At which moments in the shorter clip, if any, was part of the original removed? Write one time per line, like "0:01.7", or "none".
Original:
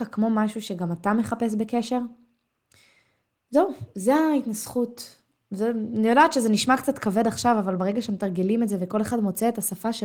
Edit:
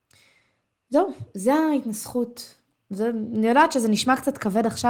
none

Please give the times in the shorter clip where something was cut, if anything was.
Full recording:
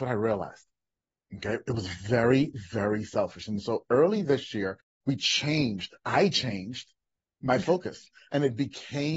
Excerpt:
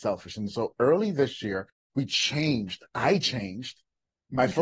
none

